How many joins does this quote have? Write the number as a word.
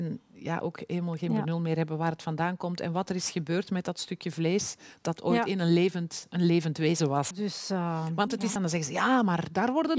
two